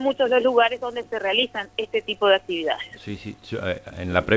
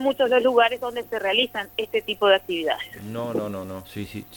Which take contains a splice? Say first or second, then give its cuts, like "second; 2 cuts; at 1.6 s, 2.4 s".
first; 1 cut; at 3.0 s